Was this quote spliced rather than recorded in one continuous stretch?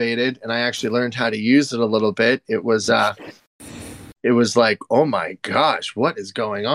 no; 0 cuts

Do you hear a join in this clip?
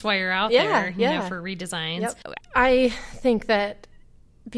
yes; 1 cut; at 2.4 s

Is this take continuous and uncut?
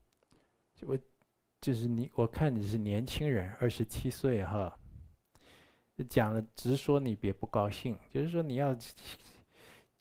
yes; 0 cuts

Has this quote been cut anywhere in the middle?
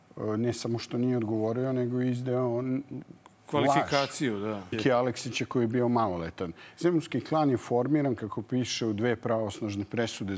yes; 1 cut; at 4.7 s

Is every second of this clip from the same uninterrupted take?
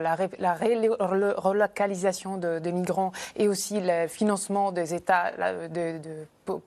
yes; 0 cuts

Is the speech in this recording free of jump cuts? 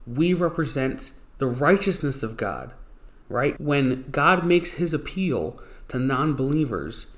no; 1 cut; at 3.6 s

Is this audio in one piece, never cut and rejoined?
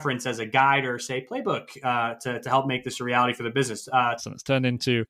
no; 1 cut; at 4.2 s

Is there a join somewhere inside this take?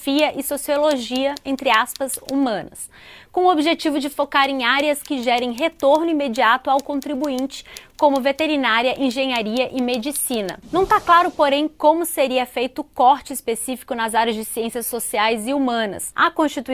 yes; 1 cut; at 10.6 s

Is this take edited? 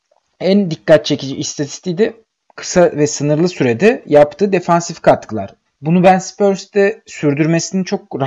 yes; 1 cut; at 5.7 s

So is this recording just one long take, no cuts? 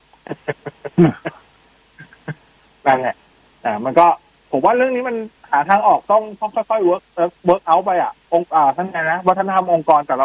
yes; 0 cuts

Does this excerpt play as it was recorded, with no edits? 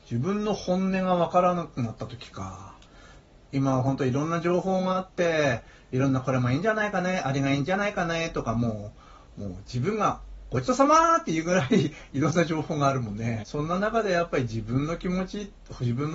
no; 2 cuts; at 3.5 s, 13.4 s

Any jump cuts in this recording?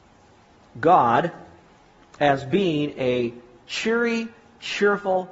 no; 0 cuts

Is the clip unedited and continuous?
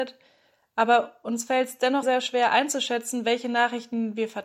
no; 1 cut; at 2.0 s

